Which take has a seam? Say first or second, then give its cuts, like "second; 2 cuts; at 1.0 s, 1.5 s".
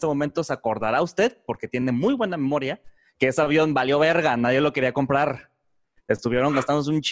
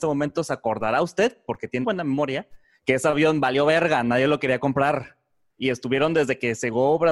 second; 2 cuts; at 1.8 s, 5.6 s